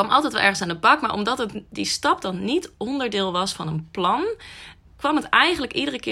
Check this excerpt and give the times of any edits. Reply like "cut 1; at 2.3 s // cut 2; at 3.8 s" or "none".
cut 1; at 4.9 s